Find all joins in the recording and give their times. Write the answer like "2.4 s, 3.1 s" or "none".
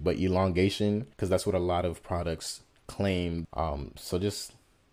1.1 s, 3.4 s